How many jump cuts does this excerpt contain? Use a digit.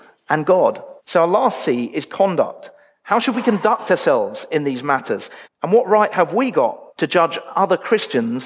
3